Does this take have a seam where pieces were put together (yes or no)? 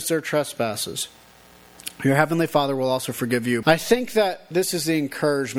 yes